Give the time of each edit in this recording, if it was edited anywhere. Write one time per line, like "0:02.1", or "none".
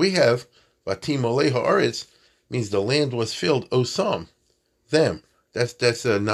none